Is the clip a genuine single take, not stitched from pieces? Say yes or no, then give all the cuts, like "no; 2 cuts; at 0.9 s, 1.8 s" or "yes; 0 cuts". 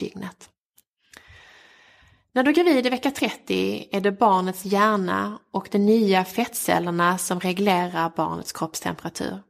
yes; 0 cuts